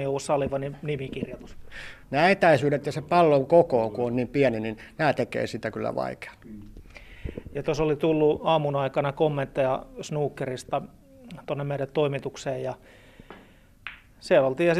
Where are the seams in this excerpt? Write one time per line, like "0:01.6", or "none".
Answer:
0:02.0